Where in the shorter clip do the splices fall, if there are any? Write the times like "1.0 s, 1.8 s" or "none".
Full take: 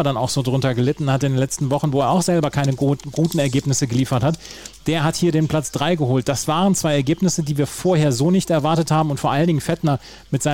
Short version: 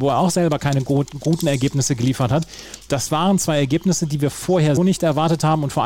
2.9 s, 4.8 s